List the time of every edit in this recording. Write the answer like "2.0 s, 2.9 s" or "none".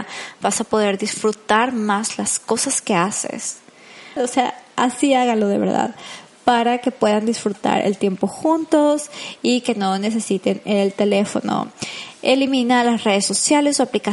4.2 s